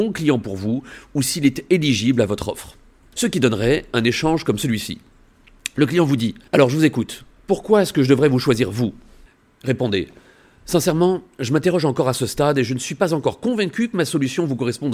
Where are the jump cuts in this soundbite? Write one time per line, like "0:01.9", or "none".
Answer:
0:03.1
0:06.5